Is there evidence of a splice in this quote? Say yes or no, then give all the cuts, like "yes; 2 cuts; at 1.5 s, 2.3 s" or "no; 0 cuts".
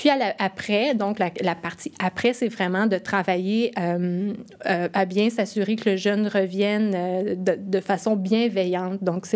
no; 0 cuts